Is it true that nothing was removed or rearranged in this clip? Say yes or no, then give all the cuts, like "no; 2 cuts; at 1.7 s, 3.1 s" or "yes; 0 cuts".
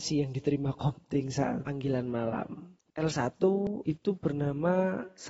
no; 1 cut; at 2.8 s